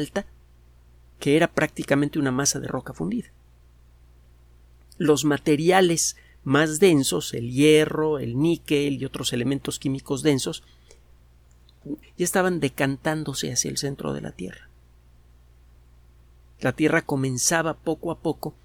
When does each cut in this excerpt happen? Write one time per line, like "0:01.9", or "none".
0:12.0